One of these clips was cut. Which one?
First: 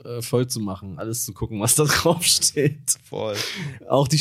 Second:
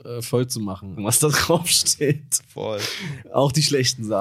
second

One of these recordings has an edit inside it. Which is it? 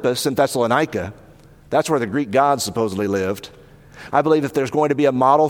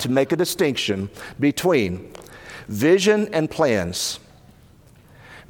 first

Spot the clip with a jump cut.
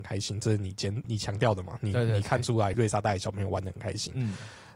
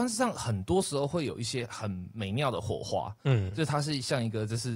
first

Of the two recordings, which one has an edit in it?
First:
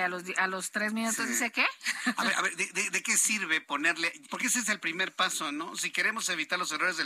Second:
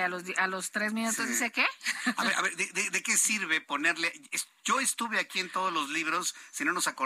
first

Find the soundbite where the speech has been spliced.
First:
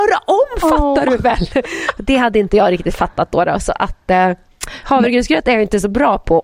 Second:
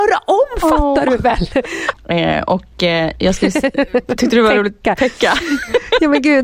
second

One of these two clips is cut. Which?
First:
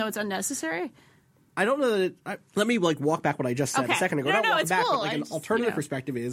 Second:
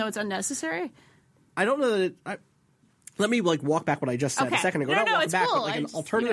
first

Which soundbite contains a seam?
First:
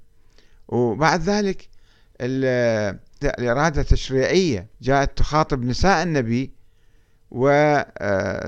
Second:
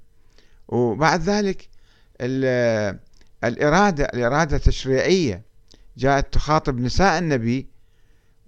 first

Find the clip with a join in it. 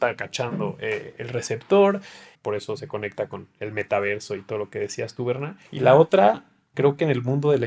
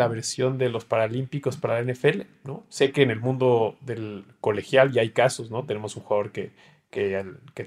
first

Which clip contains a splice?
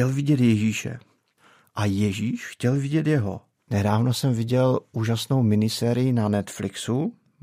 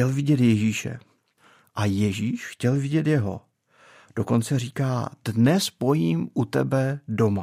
first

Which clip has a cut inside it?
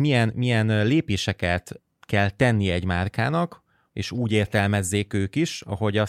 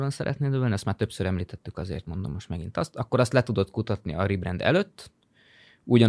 first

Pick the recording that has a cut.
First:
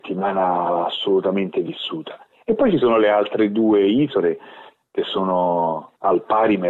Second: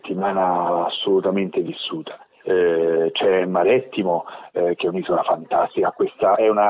second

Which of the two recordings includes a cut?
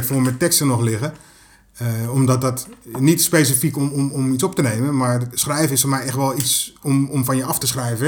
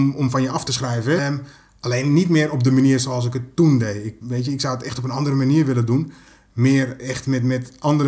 second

